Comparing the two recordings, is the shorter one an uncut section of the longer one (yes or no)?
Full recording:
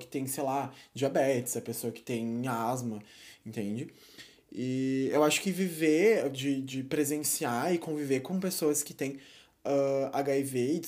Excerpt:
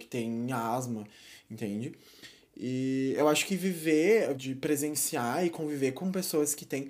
no